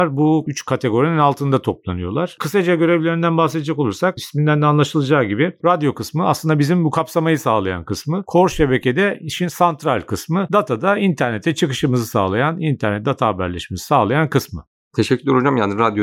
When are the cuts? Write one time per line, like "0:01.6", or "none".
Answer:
none